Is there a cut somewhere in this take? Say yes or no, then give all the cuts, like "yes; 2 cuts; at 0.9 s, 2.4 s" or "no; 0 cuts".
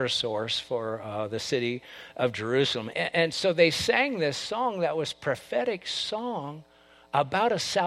yes; 1 cut; at 2.9 s